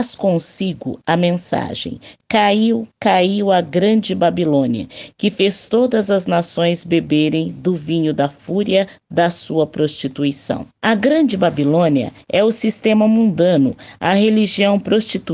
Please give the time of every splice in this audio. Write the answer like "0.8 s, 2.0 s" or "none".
10.8 s